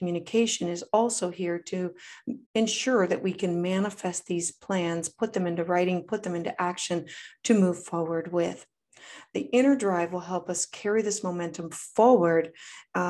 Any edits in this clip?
yes; 1 cut; at 2.4 s

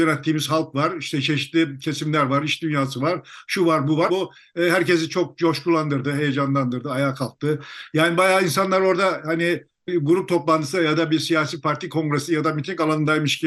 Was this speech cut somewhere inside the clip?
yes; 1 cut; at 4.1 s

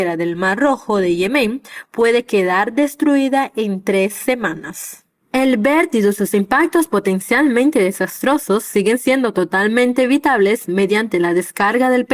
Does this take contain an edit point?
yes; 1 cut; at 5.2 s

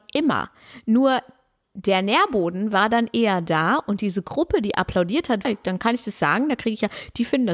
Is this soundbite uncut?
no; 1 cut; at 5.4 s

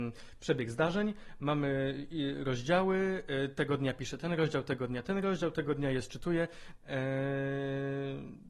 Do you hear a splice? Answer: yes; 1 cut; at 6.8 s

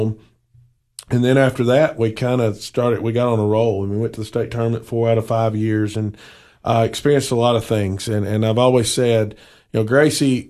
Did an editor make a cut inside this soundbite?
no; 0 cuts

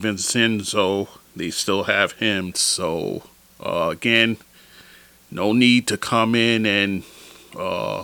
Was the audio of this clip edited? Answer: yes; 1 cut; at 2.5 s

